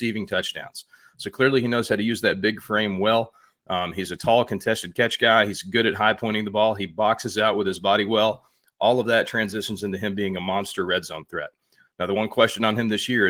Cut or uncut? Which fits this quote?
uncut